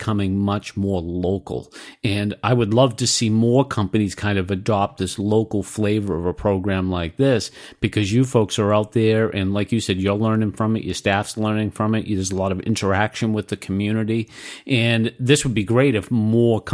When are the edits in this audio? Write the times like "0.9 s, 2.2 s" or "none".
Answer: none